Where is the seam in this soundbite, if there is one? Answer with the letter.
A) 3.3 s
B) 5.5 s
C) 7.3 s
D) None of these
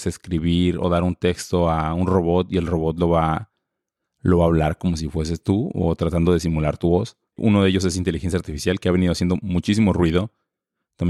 C